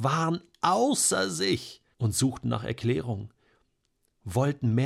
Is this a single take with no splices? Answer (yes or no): no